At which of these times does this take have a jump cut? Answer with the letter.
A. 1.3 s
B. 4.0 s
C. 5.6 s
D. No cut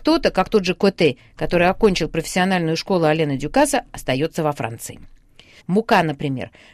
C